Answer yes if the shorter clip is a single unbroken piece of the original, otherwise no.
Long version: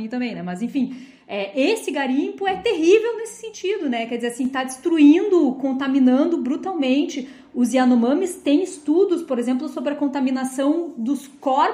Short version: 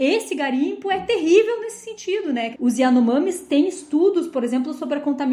no